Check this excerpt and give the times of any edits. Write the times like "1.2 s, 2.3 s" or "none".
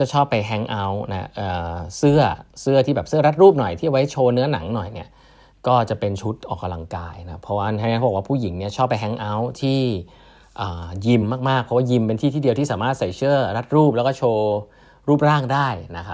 none